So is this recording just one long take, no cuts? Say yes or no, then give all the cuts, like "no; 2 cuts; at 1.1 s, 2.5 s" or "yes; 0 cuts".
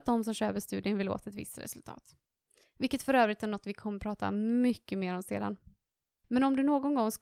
no; 1 cut; at 6.2 s